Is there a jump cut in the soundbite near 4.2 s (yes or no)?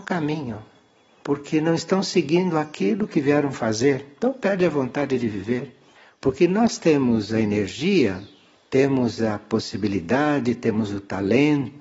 no